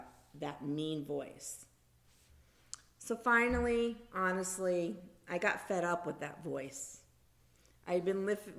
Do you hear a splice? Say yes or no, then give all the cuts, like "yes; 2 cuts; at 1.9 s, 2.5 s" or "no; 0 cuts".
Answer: no; 0 cuts